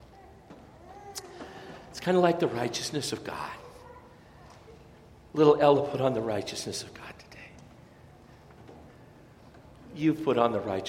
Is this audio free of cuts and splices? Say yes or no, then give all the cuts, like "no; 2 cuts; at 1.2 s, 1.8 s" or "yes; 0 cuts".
yes; 0 cuts